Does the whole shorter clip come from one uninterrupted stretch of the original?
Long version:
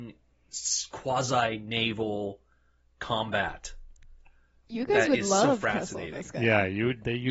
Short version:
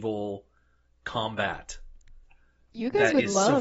yes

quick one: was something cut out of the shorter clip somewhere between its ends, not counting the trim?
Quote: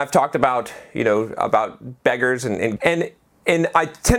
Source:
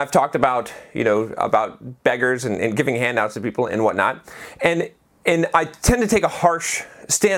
yes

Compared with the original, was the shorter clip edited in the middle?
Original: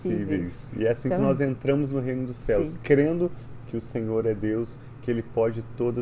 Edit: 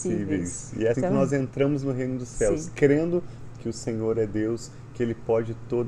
yes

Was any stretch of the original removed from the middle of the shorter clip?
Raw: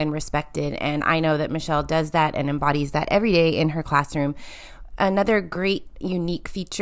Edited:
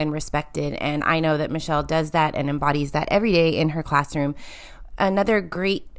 no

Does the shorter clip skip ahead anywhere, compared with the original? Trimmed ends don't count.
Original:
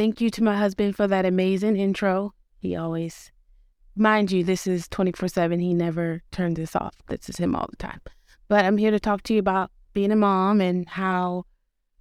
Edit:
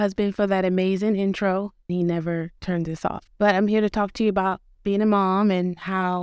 yes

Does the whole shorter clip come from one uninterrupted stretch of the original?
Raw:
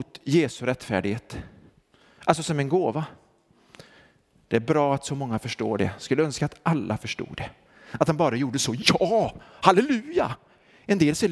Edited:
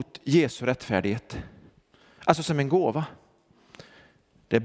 yes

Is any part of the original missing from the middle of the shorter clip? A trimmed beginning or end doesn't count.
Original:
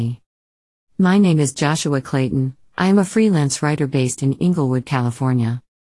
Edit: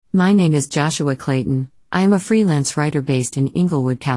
no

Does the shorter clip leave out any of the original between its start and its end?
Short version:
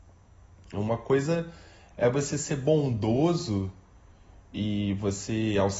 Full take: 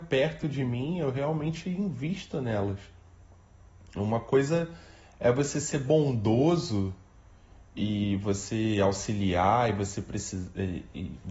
no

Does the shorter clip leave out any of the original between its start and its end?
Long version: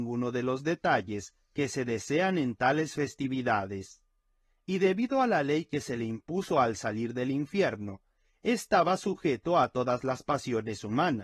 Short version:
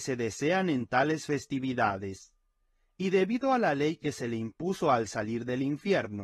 no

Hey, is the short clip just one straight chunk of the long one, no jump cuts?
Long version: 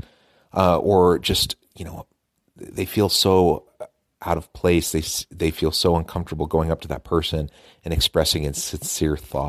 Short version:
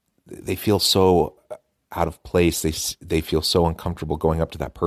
yes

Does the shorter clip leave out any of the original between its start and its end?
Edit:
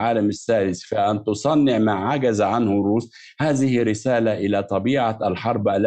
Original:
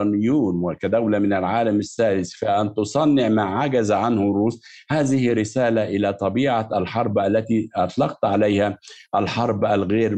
no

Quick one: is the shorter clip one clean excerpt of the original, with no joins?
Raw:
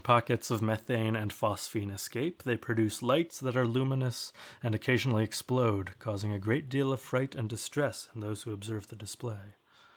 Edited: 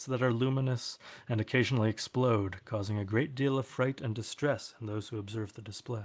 yes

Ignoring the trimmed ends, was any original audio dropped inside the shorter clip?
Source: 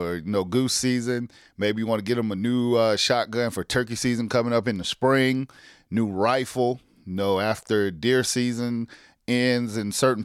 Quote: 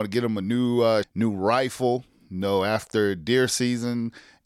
yes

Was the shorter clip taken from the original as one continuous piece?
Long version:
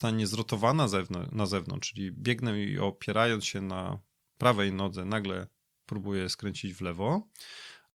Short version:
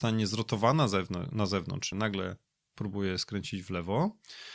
no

